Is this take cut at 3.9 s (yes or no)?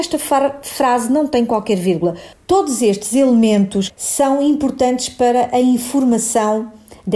yes